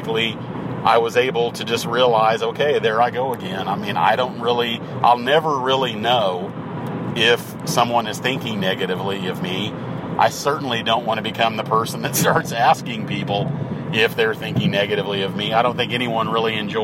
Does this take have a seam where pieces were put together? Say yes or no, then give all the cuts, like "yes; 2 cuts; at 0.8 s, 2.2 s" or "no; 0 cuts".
no; 0 cuts